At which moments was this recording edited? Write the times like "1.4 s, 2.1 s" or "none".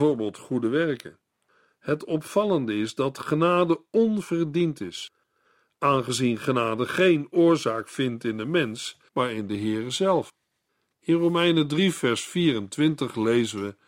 9.1 s